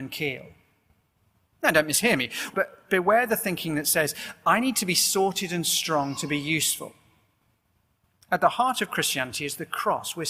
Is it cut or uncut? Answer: cut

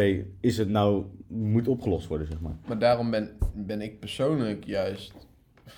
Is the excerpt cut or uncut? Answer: uncut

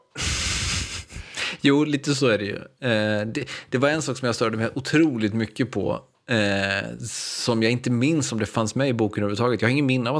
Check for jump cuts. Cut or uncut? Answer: uncut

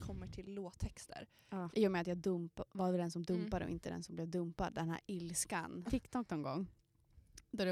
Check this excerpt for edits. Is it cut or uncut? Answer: cut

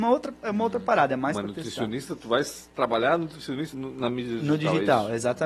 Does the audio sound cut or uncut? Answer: cut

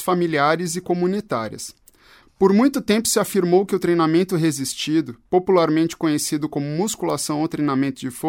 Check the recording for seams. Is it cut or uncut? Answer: cut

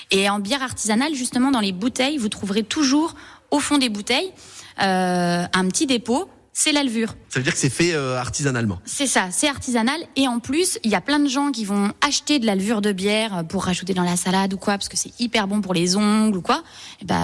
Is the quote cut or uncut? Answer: cut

